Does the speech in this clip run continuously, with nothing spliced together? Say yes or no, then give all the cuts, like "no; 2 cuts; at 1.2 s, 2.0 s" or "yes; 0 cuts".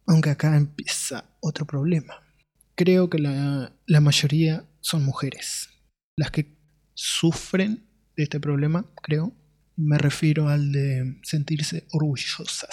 yes; 0 cuts